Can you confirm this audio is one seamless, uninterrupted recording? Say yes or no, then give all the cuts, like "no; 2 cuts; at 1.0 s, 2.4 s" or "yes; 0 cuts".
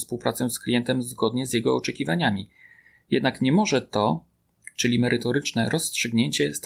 yes; 0 cuts